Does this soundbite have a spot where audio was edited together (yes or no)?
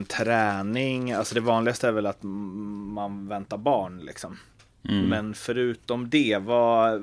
no